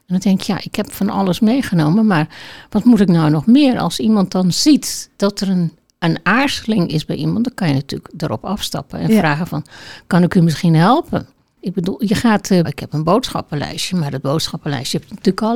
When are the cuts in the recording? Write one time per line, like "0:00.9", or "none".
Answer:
0:11.6
0:12.6

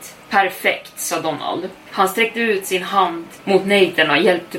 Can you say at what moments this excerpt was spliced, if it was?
none

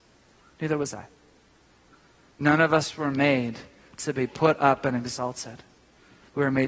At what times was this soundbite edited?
none

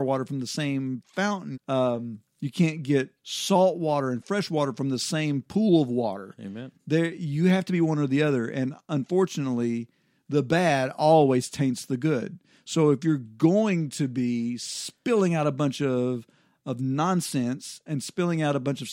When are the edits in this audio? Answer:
0:01.5

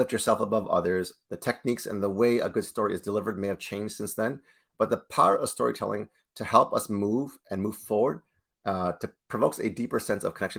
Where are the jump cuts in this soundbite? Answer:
0:01.3
0:09.2

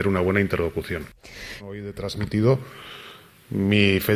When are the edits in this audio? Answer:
0:01.6

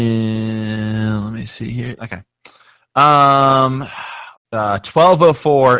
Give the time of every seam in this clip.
0:02.0
0:04.3

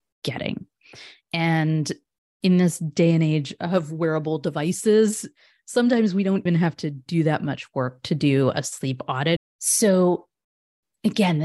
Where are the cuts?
0:06.5
0:09.4

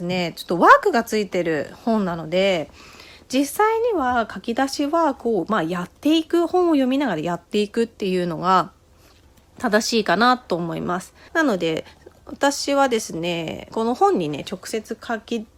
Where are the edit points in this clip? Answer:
0:11.3
0:13.7

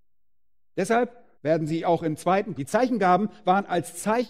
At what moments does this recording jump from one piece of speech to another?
0:01.3
0:02.5

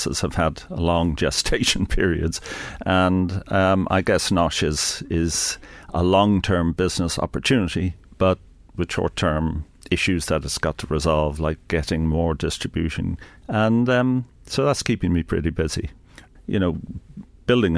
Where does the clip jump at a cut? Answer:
0:13.4
0:16.4

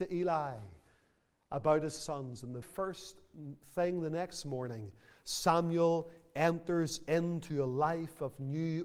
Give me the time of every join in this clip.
0:02.6

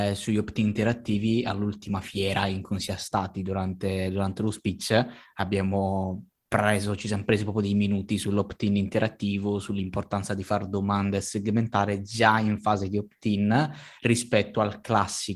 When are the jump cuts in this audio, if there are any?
none

